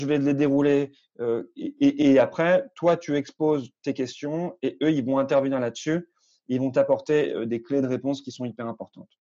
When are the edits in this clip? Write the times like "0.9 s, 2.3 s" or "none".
none